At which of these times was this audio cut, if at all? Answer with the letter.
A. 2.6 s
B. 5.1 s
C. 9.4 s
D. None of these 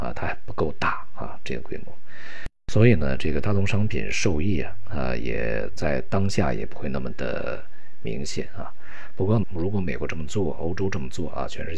C